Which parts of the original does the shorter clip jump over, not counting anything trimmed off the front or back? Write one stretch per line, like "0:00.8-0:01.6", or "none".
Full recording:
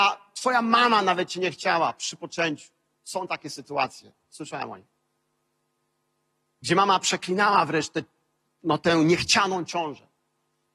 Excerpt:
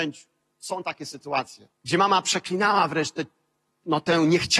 0:04.2-0:06.5